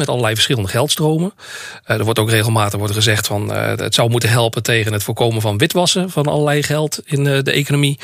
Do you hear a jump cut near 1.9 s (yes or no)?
no